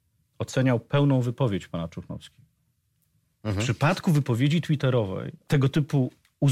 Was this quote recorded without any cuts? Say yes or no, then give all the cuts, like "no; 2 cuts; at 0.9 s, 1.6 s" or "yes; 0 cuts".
no; 2 cuts; at 3.3 s, 5.4 s